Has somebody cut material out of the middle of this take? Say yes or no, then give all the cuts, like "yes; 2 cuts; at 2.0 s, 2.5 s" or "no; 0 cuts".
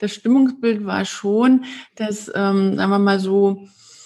no; 0 cuts